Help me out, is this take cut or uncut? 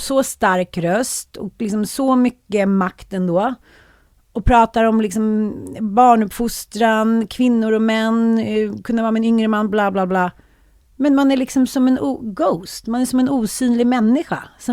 uncut